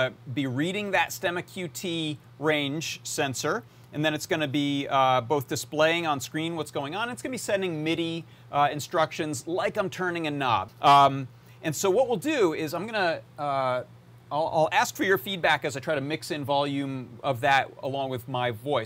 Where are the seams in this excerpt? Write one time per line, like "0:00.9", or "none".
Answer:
0:10.7